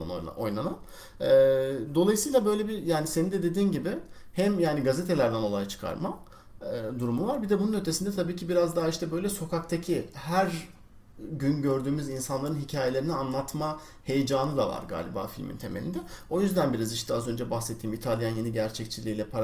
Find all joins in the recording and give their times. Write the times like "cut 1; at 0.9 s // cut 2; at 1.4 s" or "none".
none